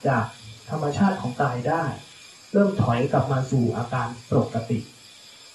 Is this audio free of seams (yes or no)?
yes